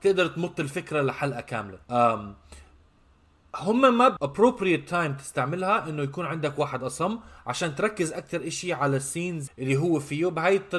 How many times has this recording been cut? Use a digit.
3